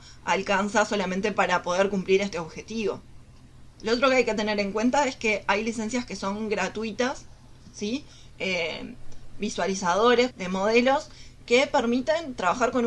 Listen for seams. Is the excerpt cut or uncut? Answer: cut